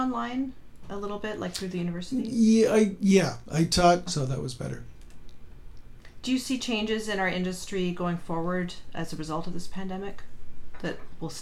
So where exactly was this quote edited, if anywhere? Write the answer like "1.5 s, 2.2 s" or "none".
4.1 s